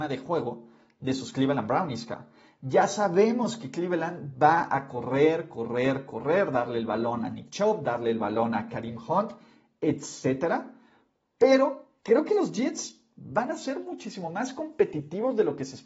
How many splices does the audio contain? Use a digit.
1